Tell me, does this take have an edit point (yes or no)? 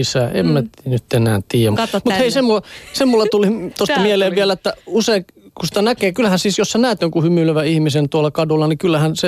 yes